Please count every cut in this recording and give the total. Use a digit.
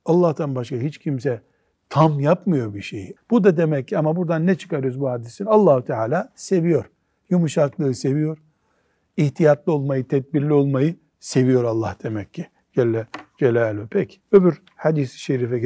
2